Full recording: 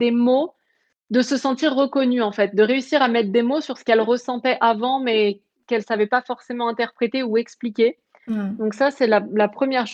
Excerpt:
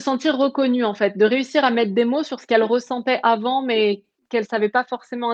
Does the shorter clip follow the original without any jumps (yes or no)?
yes